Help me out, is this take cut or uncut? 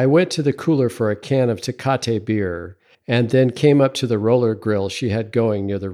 uncut